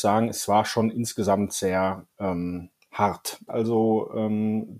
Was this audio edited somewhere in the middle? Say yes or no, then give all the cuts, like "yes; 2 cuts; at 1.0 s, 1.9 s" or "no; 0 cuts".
yes; 1 cut; at 3.5 s